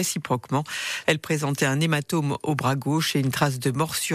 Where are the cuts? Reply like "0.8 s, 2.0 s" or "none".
1.0 s